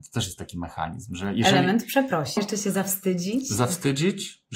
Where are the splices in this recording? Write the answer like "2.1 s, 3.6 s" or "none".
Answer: 2.4 s